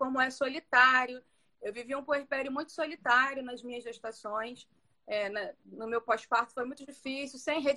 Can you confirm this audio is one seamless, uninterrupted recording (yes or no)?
no